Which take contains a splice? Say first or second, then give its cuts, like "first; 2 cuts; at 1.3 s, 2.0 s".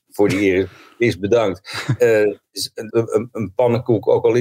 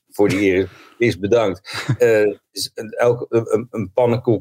first; 1 cut; at 2.9 s